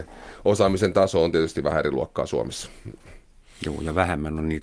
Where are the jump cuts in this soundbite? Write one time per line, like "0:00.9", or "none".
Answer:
none

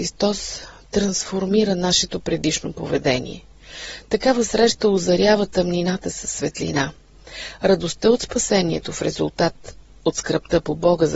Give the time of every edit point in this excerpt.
none

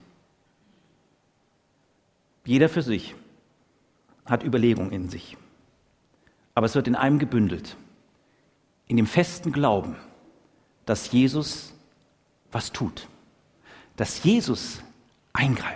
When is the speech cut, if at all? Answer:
0:02.3

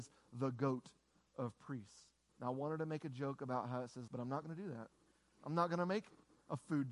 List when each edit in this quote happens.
0:02.3
0:04.1

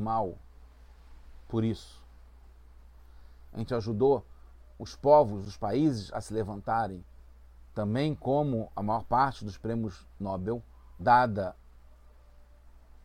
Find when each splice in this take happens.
0:03.4
0:11.0

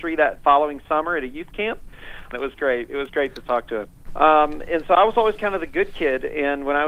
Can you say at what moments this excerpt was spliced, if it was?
0:02.3
0:04.1

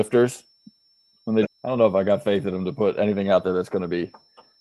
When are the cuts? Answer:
0:01.4

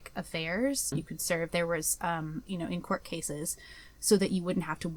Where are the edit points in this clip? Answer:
0:00.9
0:02.5

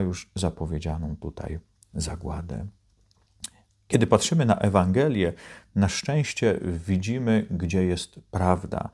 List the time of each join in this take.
none

